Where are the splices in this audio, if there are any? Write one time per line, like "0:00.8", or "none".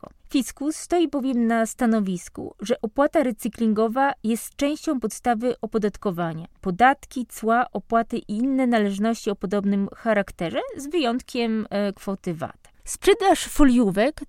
0:06.6
0:12.7